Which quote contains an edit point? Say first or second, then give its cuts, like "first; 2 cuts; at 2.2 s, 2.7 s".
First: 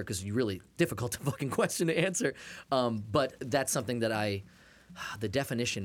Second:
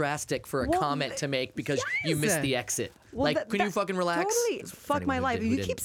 second; 1 cut; at 4.6 s